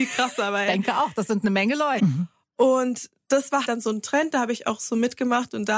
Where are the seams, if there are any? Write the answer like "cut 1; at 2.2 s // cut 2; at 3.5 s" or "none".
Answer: cut 1; at 2.0 s // cut 2; at 3.6 s